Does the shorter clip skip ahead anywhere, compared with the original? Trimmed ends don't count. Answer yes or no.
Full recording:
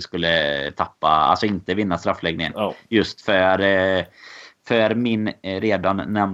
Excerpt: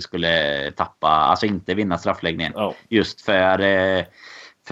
no